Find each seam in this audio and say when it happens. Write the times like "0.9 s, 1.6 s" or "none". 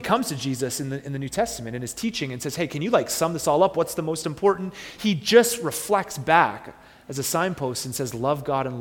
none